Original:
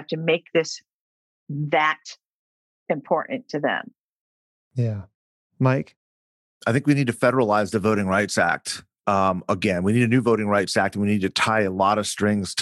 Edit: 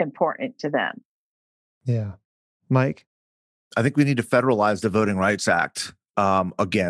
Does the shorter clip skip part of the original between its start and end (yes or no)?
no